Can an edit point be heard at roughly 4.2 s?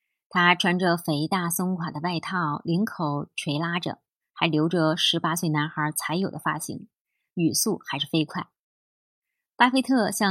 yes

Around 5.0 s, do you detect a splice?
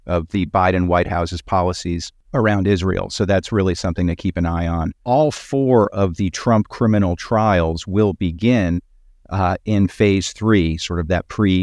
yes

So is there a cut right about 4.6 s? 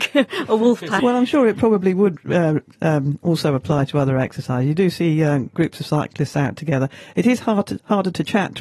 no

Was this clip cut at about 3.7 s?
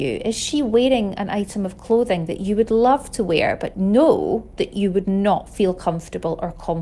yes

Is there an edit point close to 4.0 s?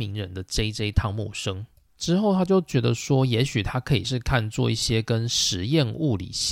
yes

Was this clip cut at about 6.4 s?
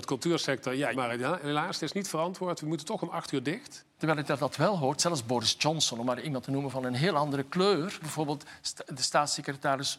no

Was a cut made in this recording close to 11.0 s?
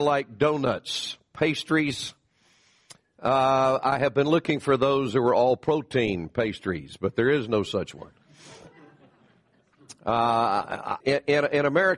yes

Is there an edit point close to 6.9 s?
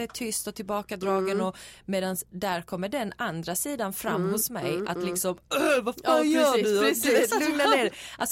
no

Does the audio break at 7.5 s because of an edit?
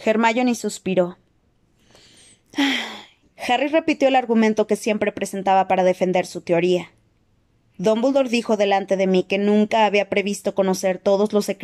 no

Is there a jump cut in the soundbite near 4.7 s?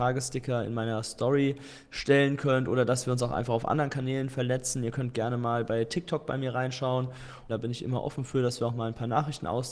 no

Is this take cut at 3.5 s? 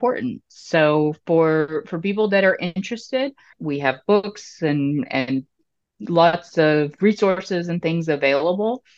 yes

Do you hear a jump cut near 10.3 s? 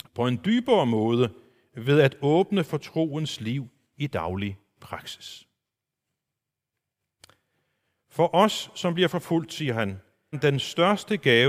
yes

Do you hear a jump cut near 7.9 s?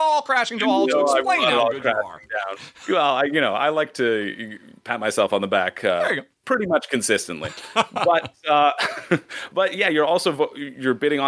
no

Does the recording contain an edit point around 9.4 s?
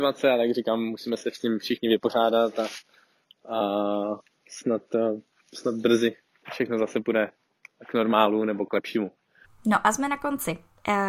yes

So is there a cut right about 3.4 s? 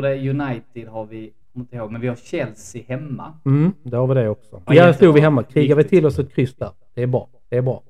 no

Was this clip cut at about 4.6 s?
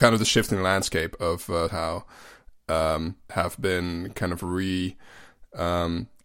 no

